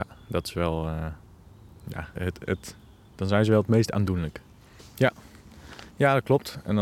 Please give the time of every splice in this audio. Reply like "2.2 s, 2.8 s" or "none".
2.1 s, 4.8 s

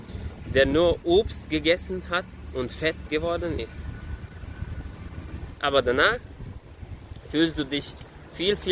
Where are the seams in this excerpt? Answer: 5.6 s

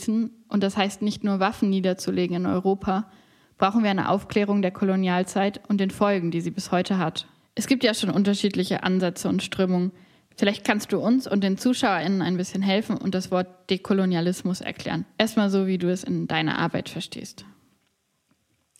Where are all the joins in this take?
none

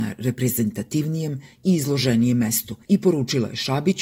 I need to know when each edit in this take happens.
2.8 s

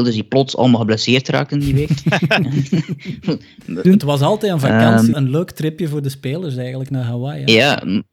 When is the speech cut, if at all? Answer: 3.8 s, 5.1 s

